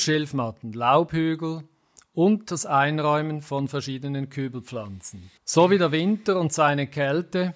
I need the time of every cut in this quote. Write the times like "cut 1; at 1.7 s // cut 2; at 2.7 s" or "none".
cut 1; at 5.4 s